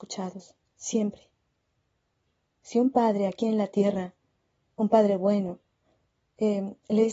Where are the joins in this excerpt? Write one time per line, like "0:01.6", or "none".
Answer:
none